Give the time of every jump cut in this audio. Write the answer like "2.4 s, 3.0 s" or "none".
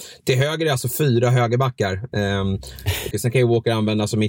3.1 s